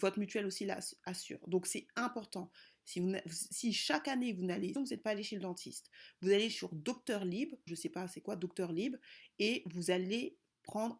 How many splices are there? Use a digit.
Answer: 2